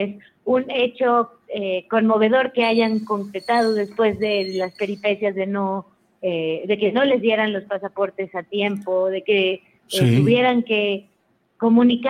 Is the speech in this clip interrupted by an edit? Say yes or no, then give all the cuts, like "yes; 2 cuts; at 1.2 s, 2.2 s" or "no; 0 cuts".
no; 0 cuts